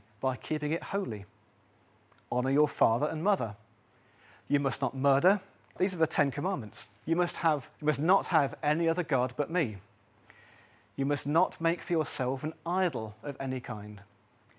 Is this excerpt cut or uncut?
cut